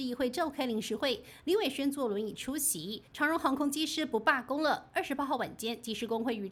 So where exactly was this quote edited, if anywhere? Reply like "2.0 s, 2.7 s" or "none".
3.1 s